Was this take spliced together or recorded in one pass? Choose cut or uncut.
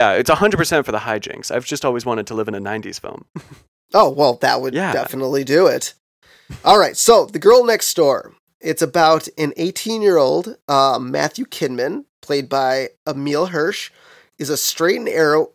uncut